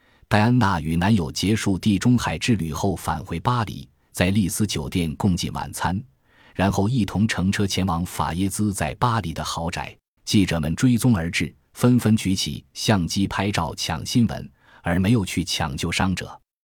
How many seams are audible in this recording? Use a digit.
1